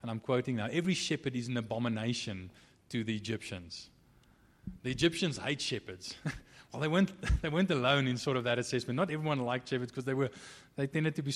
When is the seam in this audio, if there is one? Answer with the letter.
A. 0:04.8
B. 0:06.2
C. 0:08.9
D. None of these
D